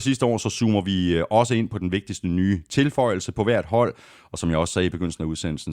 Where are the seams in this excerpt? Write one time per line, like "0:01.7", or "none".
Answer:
none